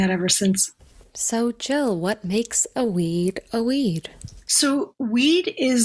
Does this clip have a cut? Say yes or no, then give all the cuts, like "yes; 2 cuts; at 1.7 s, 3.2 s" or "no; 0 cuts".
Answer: no; 0 cuts